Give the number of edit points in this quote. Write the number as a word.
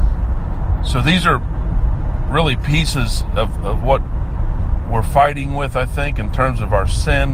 zero